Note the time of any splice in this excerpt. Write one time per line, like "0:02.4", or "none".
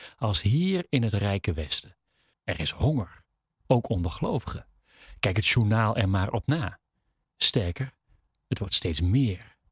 0:02.3